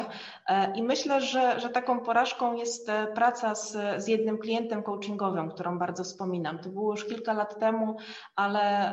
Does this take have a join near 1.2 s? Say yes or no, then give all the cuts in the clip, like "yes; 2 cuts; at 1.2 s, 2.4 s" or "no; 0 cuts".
no; 0 cuts